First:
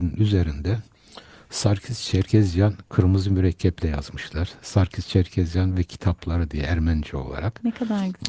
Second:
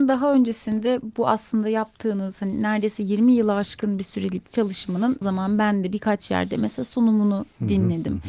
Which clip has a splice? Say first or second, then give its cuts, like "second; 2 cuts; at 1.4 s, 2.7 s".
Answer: second; 1 cut; at 5.2 s